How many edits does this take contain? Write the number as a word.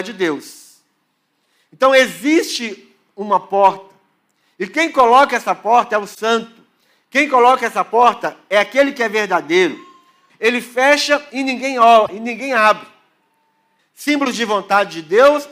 two